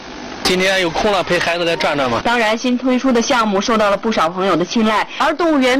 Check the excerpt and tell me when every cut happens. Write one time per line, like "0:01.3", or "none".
0:02.2

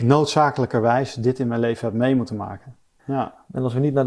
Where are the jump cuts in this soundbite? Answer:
0:03.0

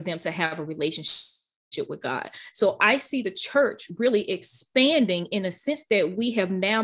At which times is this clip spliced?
none

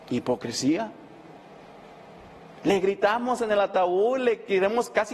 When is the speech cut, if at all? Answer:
0:02.5

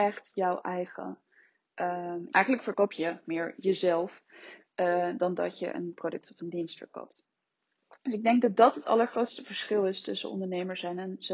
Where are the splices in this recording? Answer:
0:02.3

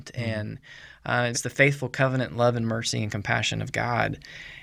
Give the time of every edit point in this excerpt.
0:01.3

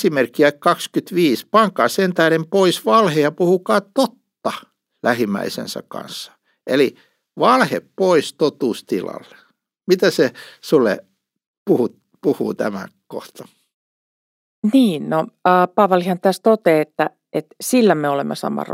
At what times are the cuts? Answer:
none

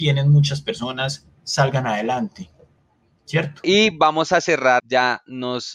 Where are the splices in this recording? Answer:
0:03.6
0:04.8

